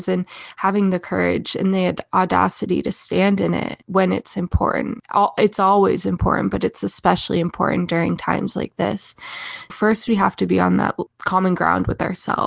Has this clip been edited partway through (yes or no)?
yes